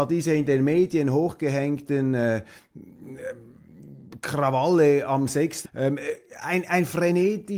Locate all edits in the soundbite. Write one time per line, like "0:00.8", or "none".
0:05.6